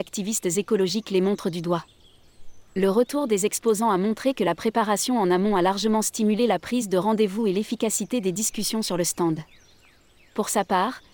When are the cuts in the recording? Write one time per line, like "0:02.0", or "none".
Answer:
none